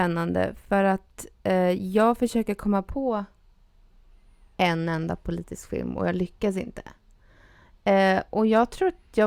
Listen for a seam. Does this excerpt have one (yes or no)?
no